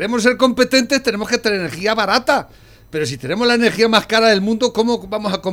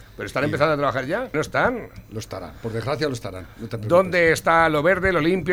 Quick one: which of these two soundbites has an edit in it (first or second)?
second